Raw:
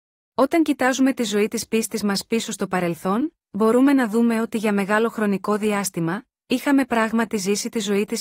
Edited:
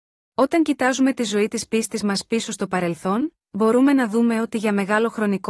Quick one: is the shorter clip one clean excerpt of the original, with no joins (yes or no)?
yes